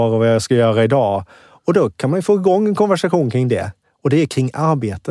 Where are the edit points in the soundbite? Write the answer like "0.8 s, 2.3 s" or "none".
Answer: none